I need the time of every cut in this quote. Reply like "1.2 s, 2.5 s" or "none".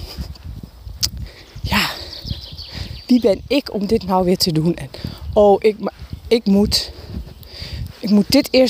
none

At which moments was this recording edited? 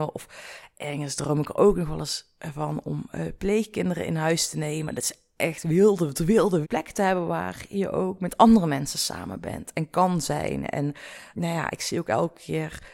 6.6 s, 11.3 s

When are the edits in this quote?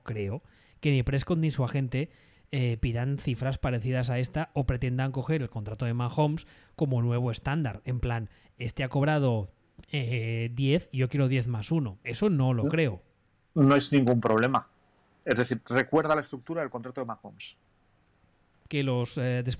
none

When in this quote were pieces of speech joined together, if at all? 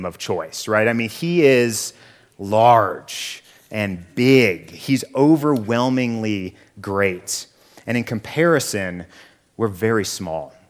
none

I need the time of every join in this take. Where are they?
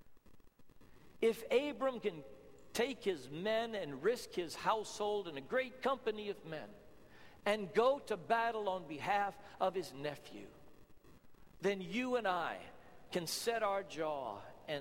none

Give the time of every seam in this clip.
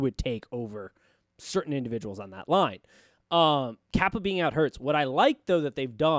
none

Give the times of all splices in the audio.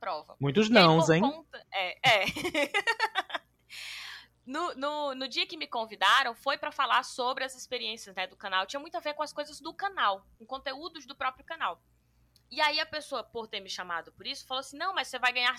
none

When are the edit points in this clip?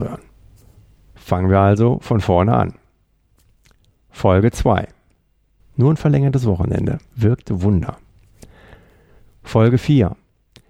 5.6 s

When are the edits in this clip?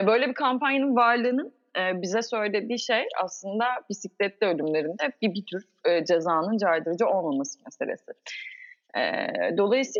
none

